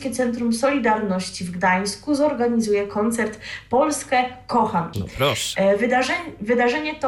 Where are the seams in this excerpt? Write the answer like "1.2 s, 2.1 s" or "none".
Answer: 4.9 s